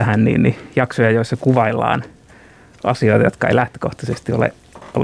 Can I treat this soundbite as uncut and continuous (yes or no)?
yes